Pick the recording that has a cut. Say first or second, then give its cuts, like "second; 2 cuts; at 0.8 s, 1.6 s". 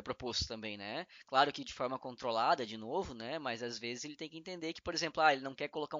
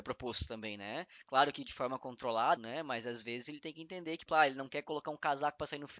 second; 2 cuts; at 2.6 s, 4.3 s